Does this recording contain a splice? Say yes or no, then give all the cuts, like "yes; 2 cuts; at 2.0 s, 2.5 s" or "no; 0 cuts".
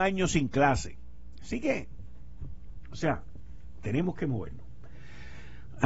yes; 1 cut; at 3.8 s